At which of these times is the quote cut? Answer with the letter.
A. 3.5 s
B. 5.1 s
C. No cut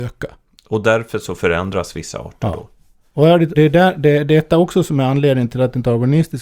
A